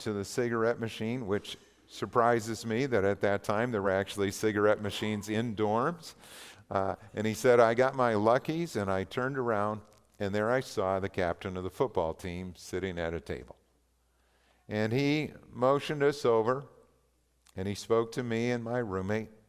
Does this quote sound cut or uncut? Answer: uncut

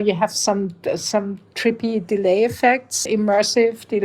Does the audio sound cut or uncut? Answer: cut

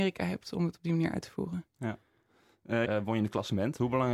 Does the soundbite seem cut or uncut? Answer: cut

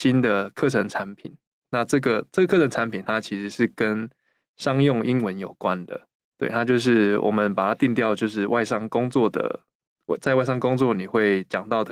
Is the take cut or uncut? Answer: uncut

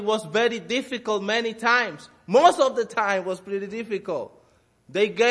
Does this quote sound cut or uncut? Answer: uncut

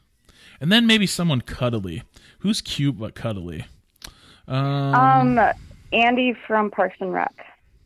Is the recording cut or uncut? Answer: uncut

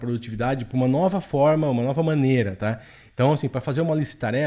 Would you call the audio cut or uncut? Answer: uncut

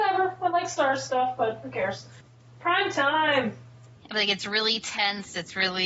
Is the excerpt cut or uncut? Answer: cut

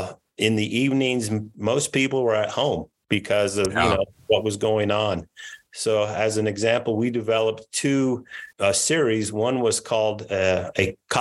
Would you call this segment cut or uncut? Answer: cut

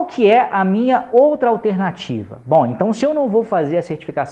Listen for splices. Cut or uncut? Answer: uncut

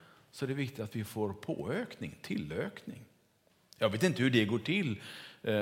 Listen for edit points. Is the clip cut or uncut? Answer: uncut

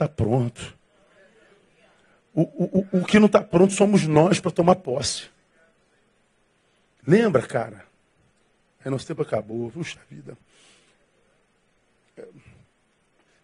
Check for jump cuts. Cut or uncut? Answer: uncut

